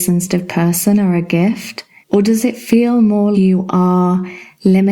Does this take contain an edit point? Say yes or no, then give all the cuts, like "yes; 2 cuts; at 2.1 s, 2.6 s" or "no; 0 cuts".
yes; 2 cuts; at 2.0 s, 3.3 s